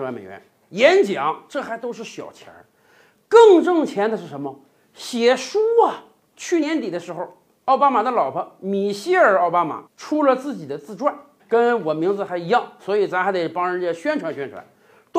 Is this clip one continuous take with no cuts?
no; 3 cuts; at 6.6 s, 9.9 s, 11.4 s

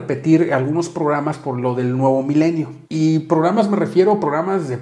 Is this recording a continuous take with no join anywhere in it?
no; 1 cut; at 2.8 s

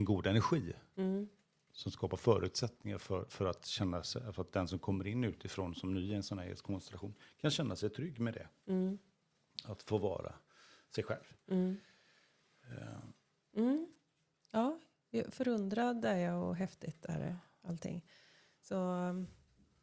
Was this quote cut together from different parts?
yes; 1 cut; at 13.5 s

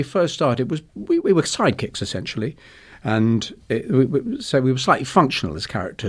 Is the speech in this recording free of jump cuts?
no; 1 cut; at 1.2 s

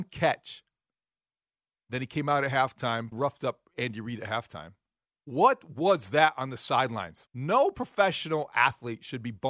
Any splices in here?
yes; 3 cuts; at 3.1 s, 5.1 s, 7.3 s

